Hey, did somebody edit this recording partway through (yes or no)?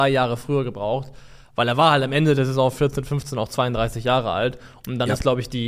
no